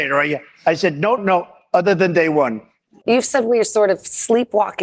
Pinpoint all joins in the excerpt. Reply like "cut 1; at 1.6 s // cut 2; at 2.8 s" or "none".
cut 1; at 1.2 s // cut 2; at 3.0 s